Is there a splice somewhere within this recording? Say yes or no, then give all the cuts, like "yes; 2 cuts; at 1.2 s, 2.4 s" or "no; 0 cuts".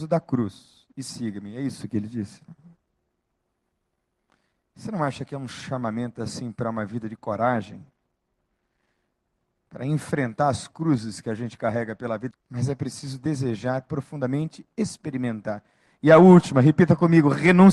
yes; 1 cut; at 12.3 s